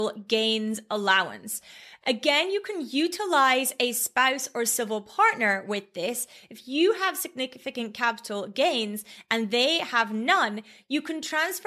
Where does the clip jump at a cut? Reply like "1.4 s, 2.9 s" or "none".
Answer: none